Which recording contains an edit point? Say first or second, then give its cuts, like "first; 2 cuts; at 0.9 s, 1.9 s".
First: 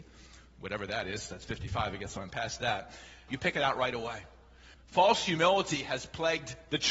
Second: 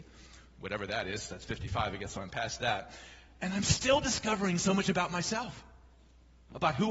first; 2 cuts; at 3.3 s, 4.7 s